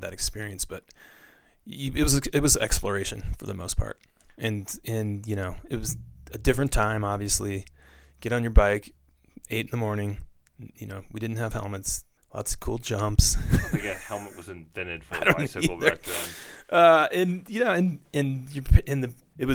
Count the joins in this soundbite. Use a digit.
0